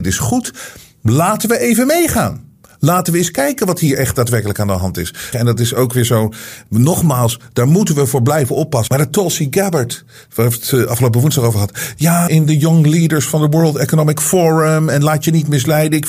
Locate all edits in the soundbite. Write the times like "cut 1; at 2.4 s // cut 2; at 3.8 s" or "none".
cut 1; at 5.3 s // cut 2; at 8.9 s // cut 3; at 12.3 s